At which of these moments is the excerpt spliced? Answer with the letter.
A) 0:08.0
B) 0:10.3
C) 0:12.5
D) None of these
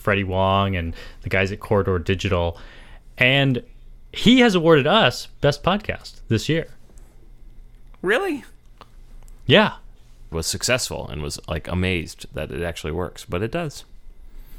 B